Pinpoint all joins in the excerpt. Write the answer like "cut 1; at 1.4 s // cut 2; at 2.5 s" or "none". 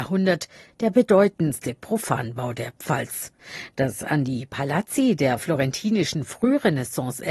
none